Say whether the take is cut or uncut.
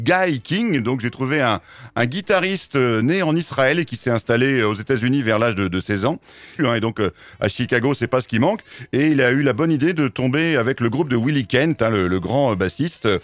cut